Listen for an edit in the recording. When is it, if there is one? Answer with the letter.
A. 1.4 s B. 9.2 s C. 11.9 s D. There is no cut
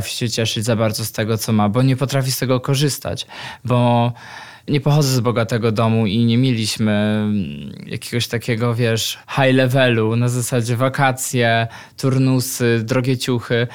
D